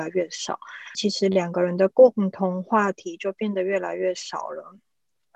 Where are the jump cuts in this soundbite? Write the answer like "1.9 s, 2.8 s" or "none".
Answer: 0.9 s